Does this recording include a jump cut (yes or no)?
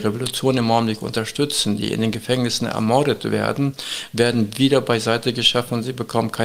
no